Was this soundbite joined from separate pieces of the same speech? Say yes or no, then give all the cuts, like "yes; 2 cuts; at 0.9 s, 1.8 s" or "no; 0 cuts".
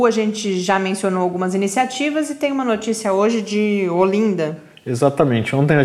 no; 0 cuts